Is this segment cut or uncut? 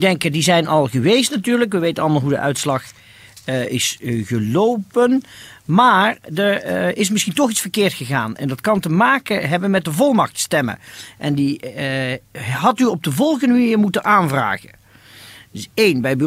uncut